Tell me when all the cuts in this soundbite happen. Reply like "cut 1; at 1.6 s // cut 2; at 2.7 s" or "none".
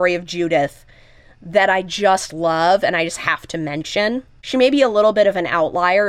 cut 1; at 4.4 s